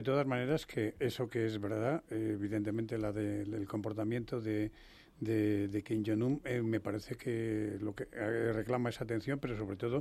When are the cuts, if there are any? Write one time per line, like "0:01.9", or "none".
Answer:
none

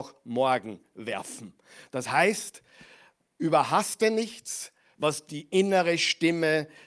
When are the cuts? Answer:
0:04.9

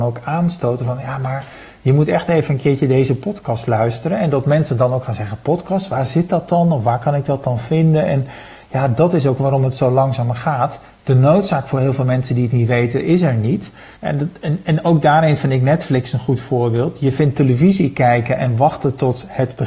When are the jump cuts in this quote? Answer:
none

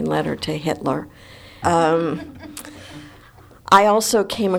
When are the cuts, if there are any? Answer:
0:01.6

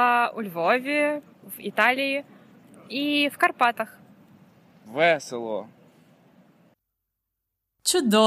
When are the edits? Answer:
0:01.3
0:04.9

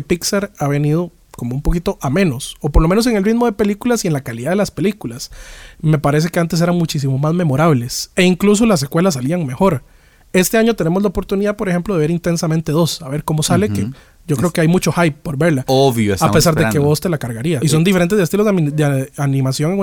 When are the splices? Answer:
0:17.6

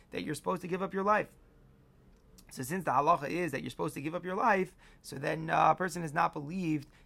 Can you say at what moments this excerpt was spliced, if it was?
none

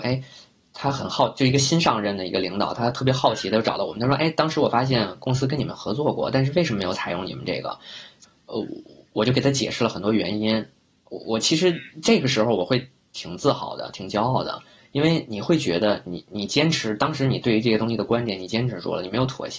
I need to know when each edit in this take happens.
none

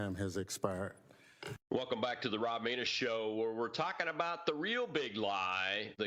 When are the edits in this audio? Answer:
0:01.6

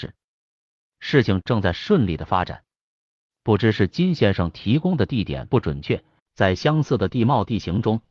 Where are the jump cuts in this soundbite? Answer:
0:03.3
0:06.2

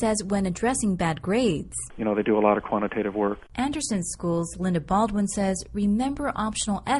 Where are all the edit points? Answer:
0:01.9

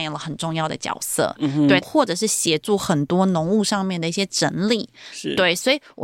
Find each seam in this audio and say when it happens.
0:01.8

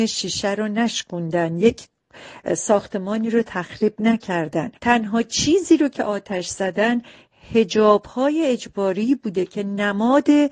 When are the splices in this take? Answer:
0:04.8

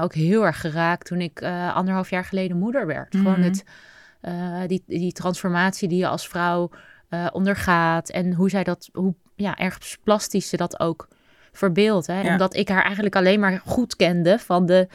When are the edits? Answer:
0:12.2

